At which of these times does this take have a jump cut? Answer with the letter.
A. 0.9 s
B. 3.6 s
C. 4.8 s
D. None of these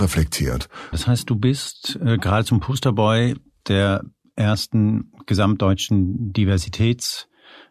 A